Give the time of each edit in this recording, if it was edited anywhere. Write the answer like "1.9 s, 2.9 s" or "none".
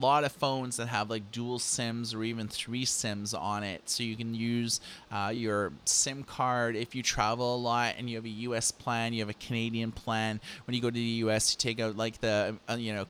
none